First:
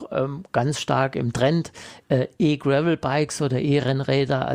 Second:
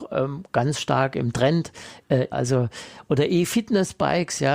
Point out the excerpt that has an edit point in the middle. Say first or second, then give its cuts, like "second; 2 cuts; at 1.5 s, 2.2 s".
second; 1 cut; at 2.3 s